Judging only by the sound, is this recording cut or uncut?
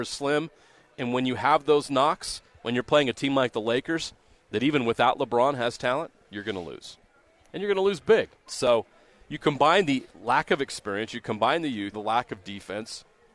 cut